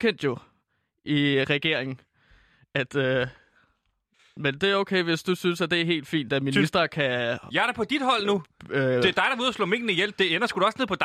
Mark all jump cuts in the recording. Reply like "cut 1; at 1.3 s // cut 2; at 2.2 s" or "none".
none